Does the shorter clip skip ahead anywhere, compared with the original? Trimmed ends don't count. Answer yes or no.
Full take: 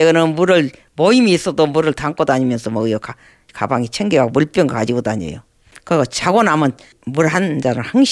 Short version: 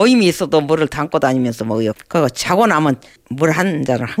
yes